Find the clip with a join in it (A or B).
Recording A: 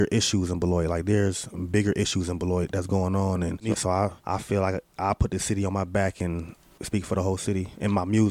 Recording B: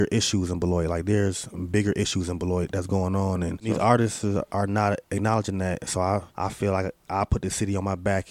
A